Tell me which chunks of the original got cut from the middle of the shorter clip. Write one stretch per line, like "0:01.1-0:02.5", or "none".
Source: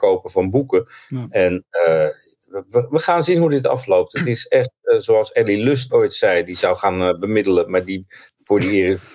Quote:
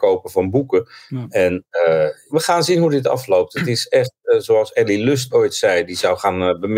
0:02.3-0:02.9

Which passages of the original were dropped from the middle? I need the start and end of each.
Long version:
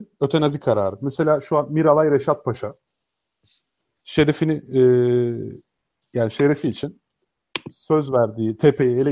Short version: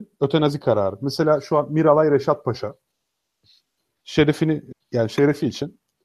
0:04.7-0:05.9

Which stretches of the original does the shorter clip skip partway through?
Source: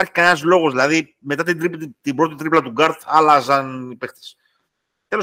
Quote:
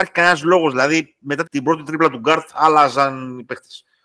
0:01.4-0:02.0

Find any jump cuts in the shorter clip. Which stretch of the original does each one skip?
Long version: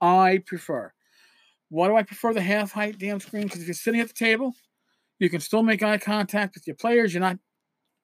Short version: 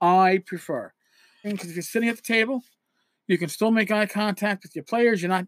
0:01.4-0:03.4

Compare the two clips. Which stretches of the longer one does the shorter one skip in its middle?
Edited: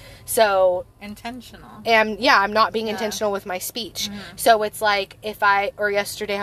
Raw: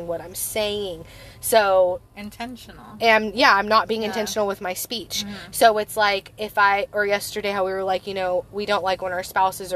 none

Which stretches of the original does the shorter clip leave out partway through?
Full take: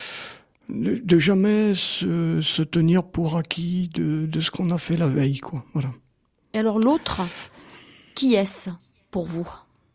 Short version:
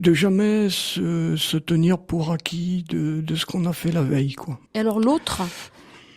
0:05.7-0:06.5

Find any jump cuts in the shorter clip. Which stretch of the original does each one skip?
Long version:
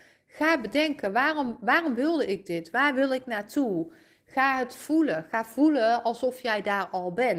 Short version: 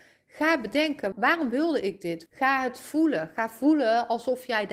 0:01.1-0:01.6
0:02.7-0:04.2

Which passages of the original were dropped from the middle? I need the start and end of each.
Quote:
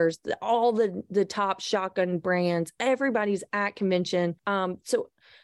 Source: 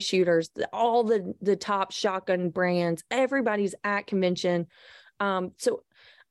0:04.7-0:05.1

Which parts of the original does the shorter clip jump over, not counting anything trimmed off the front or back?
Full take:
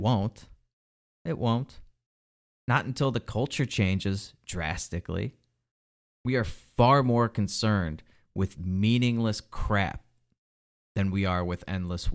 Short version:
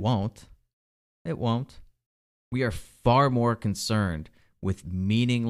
0:02.4-0:06.1

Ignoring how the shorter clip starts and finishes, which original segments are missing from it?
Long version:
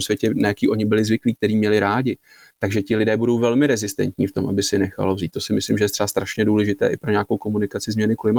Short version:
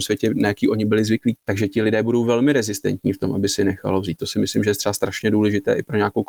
0:01.4-0:02.5

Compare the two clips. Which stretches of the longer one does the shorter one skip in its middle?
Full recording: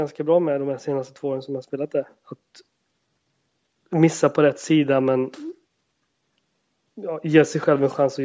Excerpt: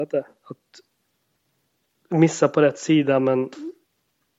none

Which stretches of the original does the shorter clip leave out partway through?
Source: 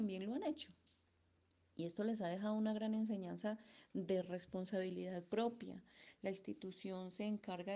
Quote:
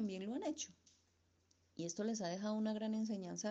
none

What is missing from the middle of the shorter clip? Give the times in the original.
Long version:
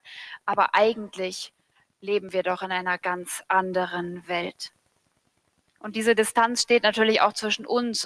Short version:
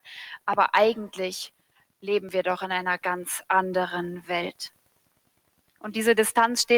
none

